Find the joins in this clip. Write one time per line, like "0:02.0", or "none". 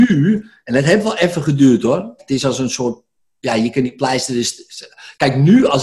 0:02.2